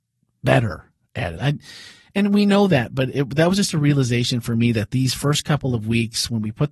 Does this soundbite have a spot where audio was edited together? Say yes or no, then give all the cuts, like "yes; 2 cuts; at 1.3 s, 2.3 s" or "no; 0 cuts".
yes; 1 cut; at 1.4 s